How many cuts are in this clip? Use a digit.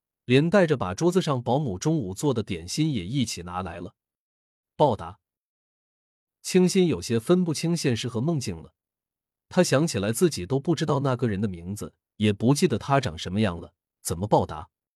1